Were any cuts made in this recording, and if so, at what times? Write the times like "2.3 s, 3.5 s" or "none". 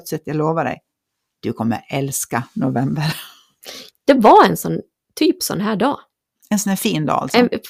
3.9 s